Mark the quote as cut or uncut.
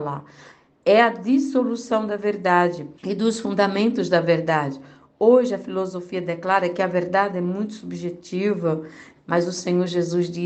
cut